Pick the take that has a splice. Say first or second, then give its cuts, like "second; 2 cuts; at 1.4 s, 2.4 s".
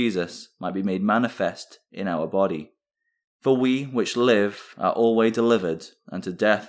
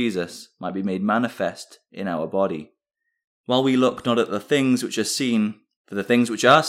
second; 2 cuts; at 3.3 s, 5.8 s